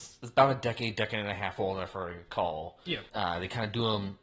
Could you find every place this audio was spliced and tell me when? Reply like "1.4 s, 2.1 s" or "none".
3.1 s